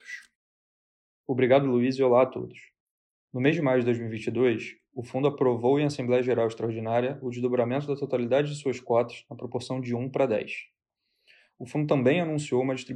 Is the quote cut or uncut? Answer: uncut